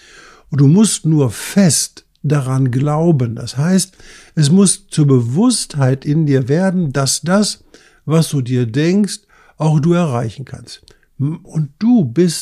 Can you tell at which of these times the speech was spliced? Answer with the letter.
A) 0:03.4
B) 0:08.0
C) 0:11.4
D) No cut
C